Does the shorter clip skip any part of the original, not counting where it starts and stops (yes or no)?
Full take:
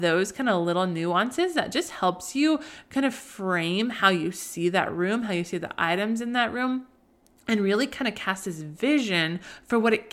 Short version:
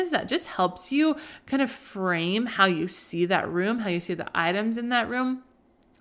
no